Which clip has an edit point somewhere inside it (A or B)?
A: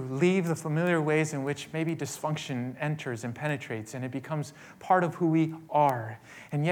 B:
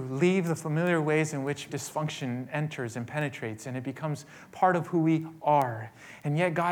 B